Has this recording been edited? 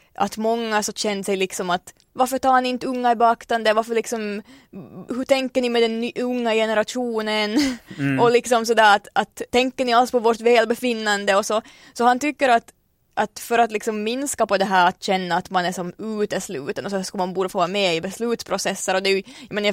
yes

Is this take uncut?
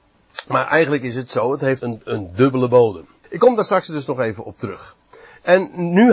no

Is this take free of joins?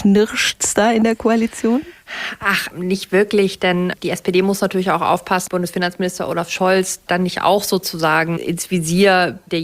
no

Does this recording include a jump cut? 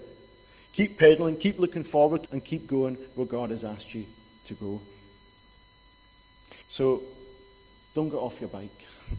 yes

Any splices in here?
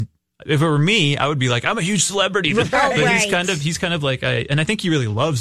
yes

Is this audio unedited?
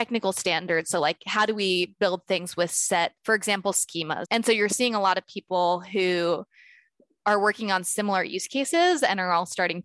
no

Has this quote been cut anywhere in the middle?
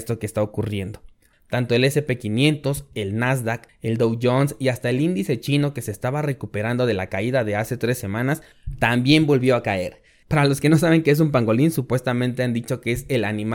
yes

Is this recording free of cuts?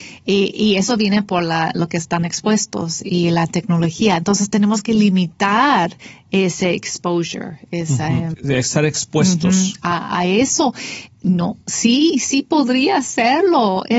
no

